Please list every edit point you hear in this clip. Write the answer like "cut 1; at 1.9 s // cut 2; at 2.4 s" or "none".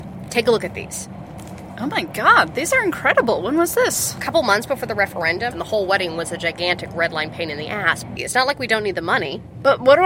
cut 1; at 5.5 s // cut 2; at 8.2 s